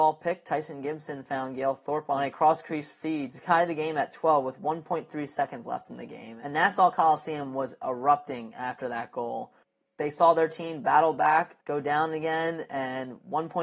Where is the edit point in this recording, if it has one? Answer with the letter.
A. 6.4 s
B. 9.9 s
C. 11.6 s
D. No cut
C